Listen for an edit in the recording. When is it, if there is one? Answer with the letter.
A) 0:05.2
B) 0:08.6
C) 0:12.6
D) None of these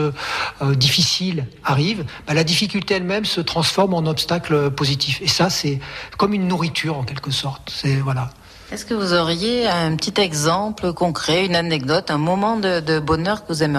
D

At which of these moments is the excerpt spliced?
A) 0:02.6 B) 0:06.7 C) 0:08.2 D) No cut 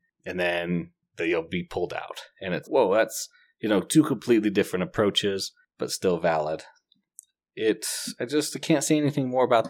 A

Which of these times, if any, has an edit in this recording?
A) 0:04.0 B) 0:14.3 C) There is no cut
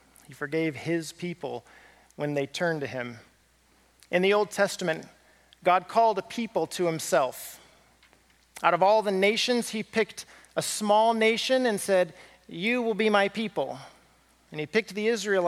A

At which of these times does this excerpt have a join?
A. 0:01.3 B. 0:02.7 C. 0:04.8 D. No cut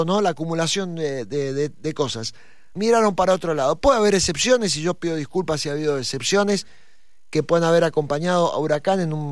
B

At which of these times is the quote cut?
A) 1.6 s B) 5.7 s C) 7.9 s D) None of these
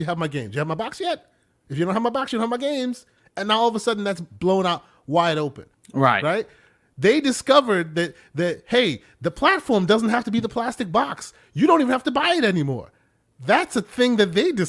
B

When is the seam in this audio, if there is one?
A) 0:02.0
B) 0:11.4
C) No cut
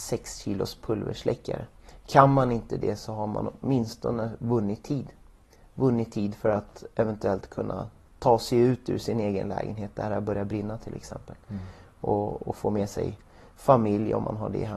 C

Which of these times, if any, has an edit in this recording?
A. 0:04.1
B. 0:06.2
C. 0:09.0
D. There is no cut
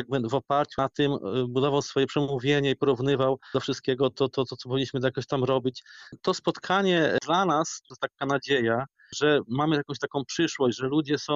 D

